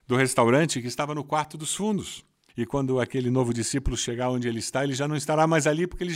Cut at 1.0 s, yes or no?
no